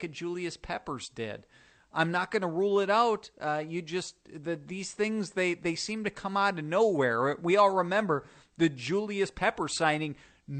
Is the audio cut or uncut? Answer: cut